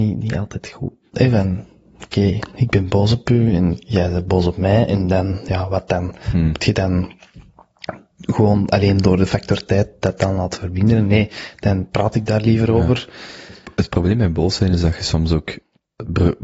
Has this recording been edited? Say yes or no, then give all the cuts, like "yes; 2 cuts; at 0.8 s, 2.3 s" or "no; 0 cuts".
yes; 1 cut; at 1.1 s